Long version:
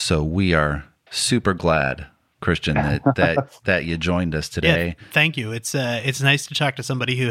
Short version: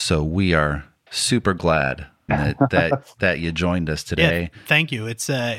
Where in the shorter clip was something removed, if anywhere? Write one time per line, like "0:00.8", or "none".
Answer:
0:02.3